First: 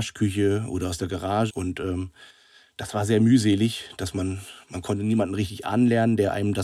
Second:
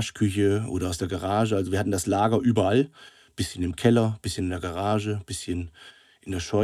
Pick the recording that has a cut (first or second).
first